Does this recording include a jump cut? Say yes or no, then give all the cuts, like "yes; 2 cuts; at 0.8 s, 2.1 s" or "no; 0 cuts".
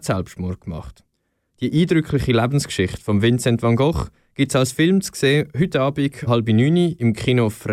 yes; 1 cut; at 6.3 s